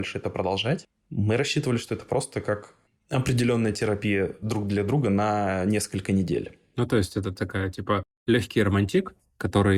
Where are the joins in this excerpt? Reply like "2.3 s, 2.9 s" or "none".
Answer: none